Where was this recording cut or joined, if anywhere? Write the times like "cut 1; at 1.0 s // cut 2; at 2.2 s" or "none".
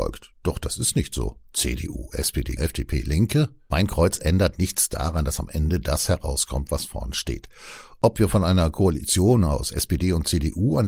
cut 1; at 2.6 s